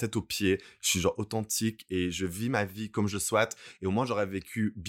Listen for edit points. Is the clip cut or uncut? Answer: uncut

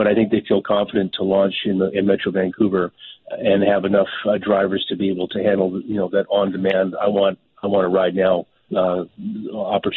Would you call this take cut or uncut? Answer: cut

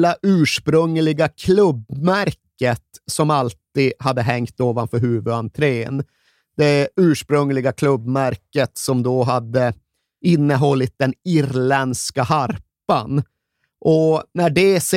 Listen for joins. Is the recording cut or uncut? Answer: uncut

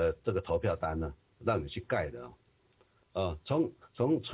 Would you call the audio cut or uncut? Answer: cut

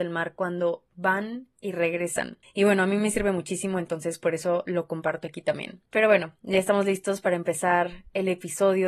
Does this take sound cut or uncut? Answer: uncut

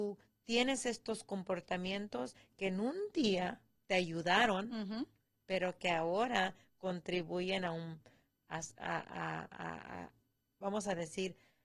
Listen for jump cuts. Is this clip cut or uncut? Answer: uncut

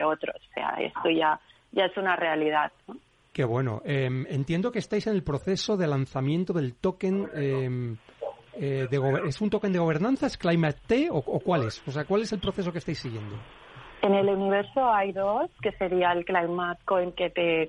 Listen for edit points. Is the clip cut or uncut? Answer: uncut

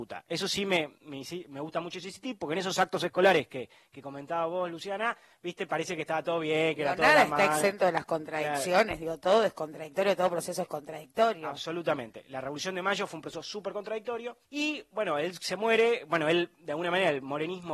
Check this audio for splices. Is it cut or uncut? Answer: cut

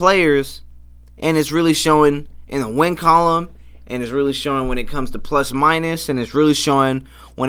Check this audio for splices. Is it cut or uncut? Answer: uncut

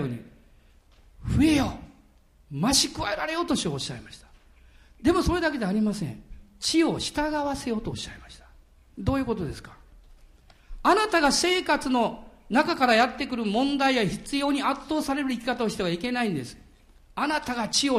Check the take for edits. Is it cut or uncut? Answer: uncut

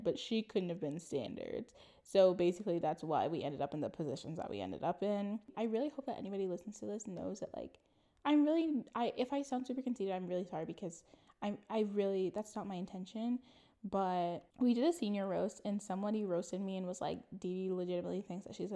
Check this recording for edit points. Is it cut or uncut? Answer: cut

